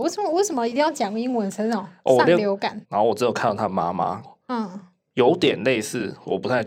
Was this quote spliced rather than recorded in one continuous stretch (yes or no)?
yes